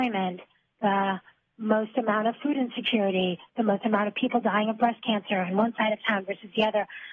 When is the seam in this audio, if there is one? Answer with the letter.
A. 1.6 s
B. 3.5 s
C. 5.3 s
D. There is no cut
B